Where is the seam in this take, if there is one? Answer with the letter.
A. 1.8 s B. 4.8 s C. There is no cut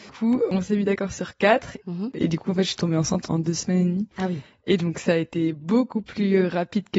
A